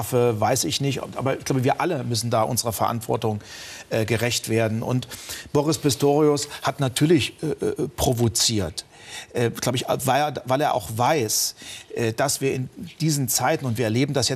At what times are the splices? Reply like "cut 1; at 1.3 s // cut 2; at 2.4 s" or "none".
none